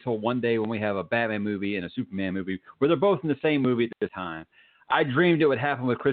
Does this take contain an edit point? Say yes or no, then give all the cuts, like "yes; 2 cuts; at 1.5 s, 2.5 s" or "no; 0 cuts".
no; 0 cuts